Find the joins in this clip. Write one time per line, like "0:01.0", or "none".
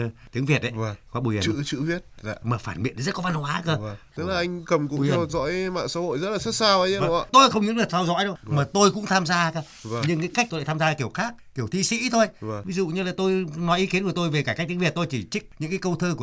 0:02.4